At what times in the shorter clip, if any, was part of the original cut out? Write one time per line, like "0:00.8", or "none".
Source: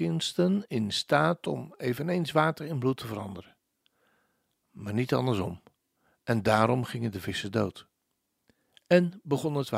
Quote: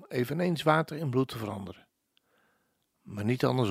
none